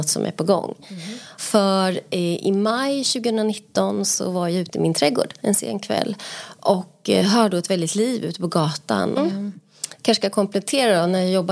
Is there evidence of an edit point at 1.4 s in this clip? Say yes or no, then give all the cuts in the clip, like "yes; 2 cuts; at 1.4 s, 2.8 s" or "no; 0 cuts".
yes; 2 cuts; at 1.4 s, 9.2 s